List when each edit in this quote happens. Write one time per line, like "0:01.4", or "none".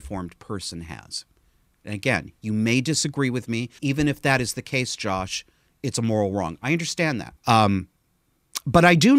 0:03.8
0:07.4